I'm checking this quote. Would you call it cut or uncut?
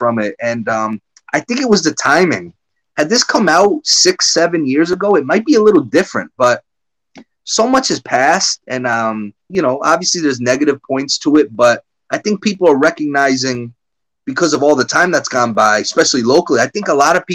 cut